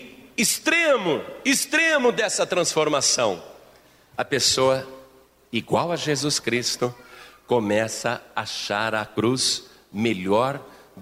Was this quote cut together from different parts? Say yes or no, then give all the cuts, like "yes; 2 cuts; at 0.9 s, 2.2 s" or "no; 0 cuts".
no; 0 cuts